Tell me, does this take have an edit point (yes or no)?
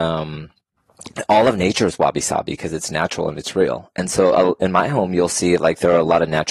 no